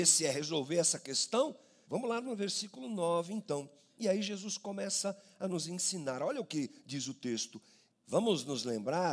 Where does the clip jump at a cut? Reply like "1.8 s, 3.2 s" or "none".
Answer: 1.8 s, 7.9 s